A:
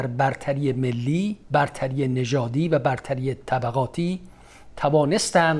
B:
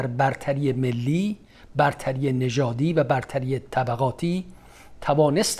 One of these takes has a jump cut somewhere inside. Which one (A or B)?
A